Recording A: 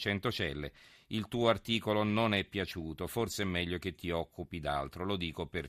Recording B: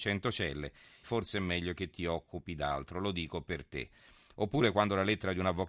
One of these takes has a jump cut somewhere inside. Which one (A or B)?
B